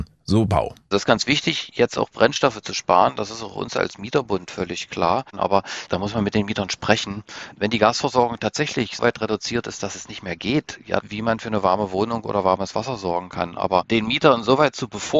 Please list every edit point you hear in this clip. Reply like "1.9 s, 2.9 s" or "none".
9.0 s, 11.0 s